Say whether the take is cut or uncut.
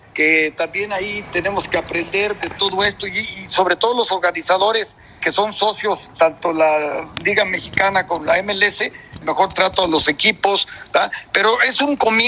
cut